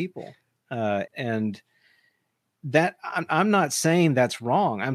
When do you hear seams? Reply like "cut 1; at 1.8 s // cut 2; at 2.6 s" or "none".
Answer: cut 1; at 1.1 s